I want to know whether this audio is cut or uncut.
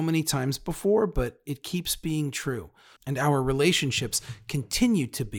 cut